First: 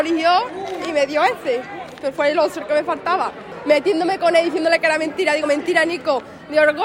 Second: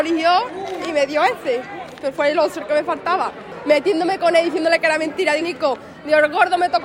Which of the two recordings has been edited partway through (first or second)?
second